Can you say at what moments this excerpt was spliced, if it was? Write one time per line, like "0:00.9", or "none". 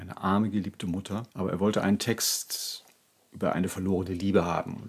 0:01.3